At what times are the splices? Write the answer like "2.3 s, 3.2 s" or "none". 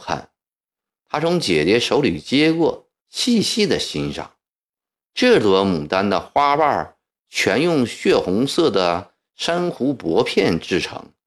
3.0 s

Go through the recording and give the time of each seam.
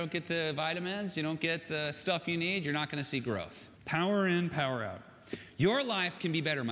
3.7 s

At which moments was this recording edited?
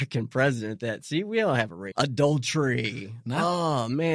1.9 s

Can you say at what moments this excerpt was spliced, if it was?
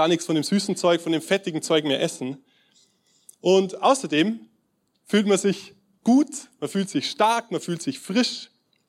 none

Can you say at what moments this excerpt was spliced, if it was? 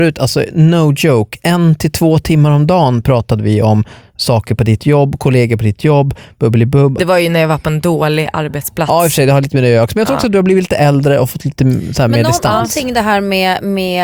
7.0 s

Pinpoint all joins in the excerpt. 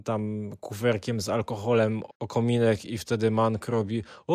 2.1 s

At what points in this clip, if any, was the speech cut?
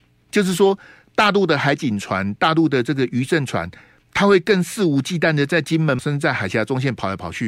6.0 s

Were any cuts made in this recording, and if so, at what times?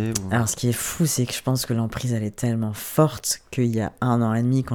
none

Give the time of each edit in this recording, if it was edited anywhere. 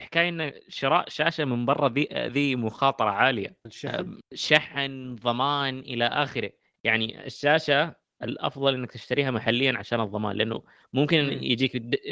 none

